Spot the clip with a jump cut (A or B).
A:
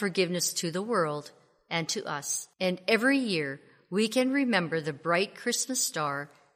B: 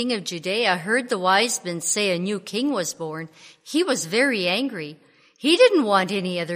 A